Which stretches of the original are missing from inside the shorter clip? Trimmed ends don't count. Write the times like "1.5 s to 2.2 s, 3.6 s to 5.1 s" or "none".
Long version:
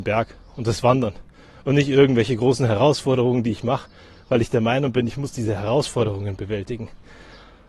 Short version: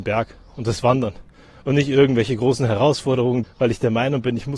3.4 s to 4.1 s